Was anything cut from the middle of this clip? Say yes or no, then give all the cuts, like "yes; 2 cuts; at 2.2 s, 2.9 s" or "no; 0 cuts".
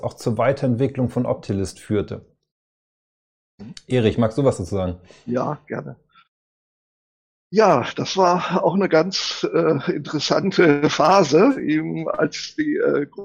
no; 0 cuts